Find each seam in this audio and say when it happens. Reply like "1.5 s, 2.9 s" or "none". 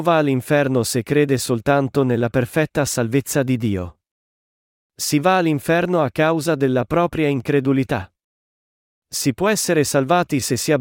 none

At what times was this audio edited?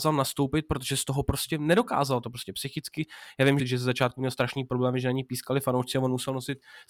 3.6 s

